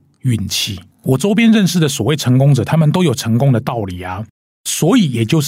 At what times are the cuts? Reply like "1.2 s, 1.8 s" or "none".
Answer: 0.9 s